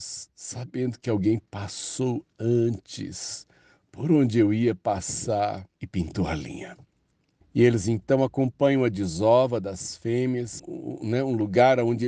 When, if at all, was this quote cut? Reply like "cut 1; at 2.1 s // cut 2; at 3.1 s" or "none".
cut 1; at 5.8 s // cut 2; at 7.4 s // cut 3; at 10.6 s

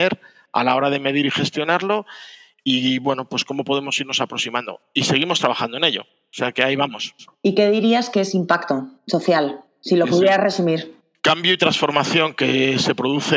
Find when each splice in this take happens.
none

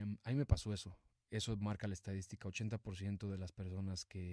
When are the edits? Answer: cut 1; at 1.2 s

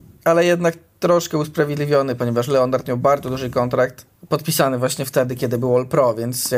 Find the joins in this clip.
cut 1; at 4.2 s

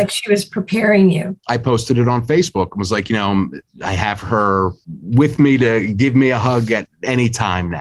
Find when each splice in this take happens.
cut 1; at 1.4 s

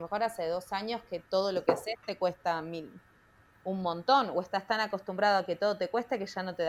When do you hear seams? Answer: none

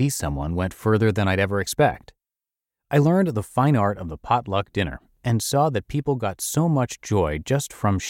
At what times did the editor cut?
none

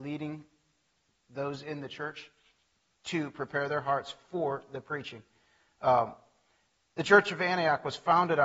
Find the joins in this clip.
none

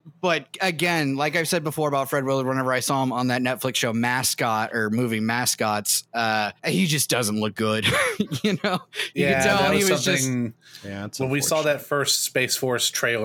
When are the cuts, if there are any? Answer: cut 1; at 6.6 s

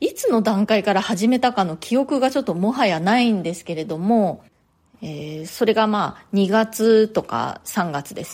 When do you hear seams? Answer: cut 1; at 4.9 s

